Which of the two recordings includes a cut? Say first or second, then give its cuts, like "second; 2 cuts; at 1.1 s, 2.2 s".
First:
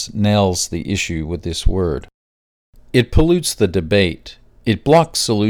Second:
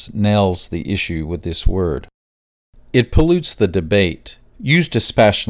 second; 1 cut; at 4.5 s